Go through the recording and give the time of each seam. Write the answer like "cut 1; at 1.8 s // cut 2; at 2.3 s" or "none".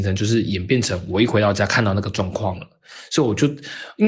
none